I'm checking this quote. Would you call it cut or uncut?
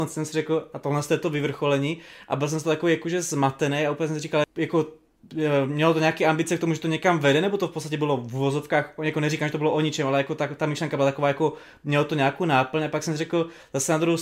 cut